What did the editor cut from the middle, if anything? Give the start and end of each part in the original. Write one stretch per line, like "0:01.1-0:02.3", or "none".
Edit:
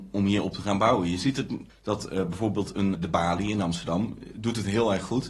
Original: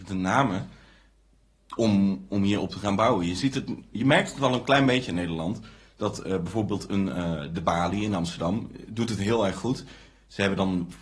0:03.9-0:05.8
0:07.1-0:07.5